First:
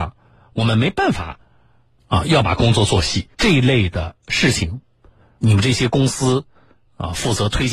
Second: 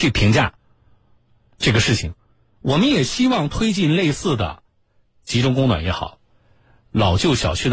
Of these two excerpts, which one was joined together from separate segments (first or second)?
first